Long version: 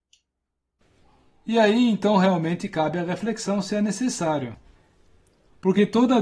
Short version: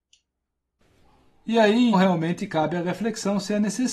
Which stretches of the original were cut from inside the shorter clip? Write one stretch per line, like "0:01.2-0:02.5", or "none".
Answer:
0:01.9-0:02.1